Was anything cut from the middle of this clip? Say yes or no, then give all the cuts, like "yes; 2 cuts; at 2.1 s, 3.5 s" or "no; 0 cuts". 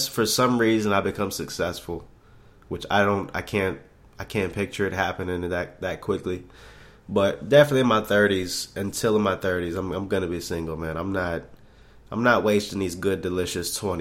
no; 0 cuts